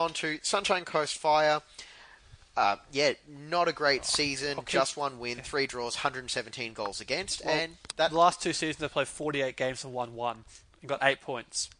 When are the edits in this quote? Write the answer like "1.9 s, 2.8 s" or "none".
none